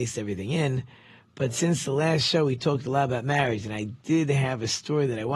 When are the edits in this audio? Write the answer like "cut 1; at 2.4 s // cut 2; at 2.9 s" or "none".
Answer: none

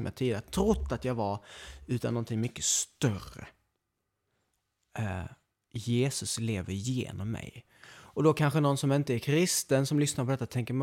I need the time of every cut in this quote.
none

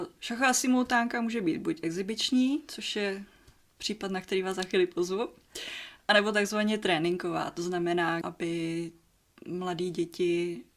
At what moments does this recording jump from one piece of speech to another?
cut 1; at 8.2 s

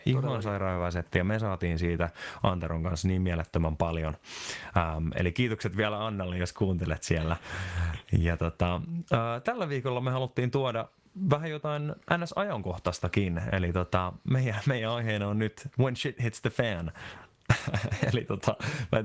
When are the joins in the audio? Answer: none

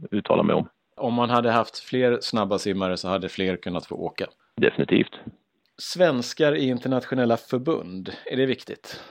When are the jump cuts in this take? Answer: none

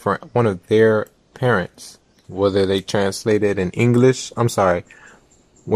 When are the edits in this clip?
cut 1; at 2.2 s

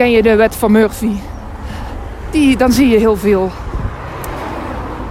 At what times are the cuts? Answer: none

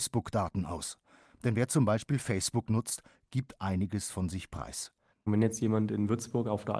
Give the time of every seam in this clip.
cut 1; at 5.1 s

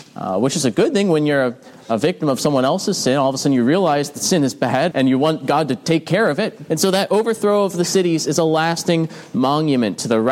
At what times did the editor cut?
cut 1; at 4.9 s // cut 2; at 6.7 s

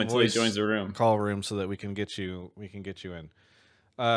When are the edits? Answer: none

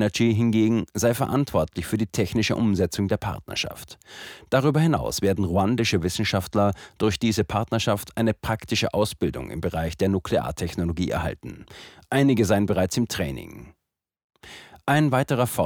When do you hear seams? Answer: none

